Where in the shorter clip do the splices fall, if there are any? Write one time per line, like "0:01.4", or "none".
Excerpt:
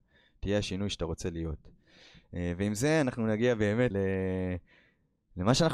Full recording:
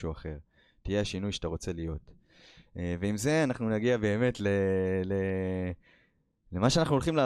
0:03.9